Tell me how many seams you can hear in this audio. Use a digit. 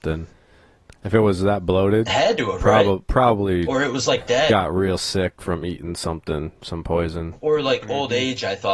0